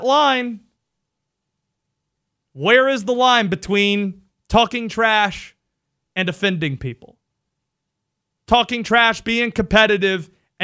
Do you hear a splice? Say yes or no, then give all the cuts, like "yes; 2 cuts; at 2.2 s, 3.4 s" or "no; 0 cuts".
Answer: no; 0 cuts